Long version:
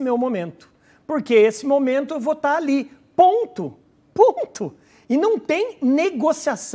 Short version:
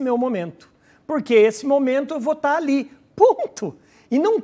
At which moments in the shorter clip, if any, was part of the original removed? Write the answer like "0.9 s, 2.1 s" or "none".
3.1 s